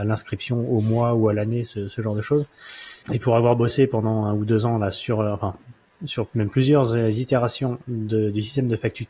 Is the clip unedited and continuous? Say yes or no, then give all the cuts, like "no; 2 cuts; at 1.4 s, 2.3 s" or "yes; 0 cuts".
no; 1 cut; at 3.0 s